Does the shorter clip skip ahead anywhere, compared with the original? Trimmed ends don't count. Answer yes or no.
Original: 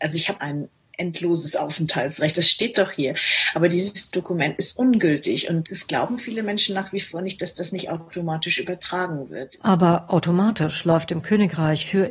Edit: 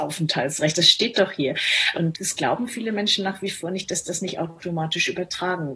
yes